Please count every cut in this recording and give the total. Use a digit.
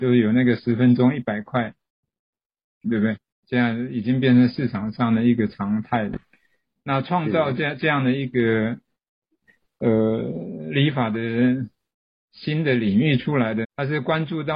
2